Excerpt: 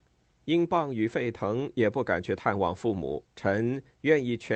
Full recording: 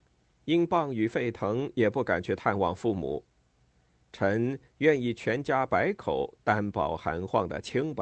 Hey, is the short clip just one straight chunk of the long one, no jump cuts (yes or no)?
no